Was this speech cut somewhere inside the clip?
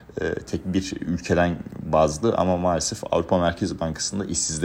no; 0 cuts

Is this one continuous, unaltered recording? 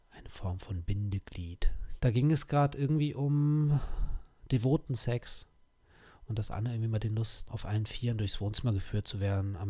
no; 2 cuts; at 2.0 s, 7.5 s

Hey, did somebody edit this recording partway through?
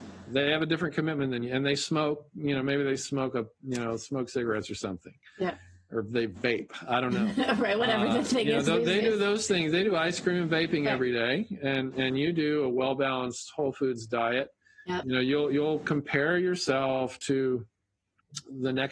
yes; 1 cut; at 15.0 s

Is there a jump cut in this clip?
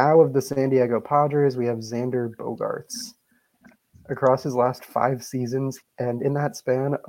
yes; 2 cuts; at 3.9 s, 5.8 s

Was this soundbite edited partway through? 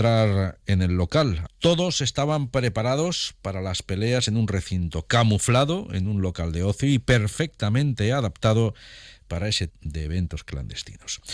yes; 2 cuts; at 1.5 s, 9.7 s

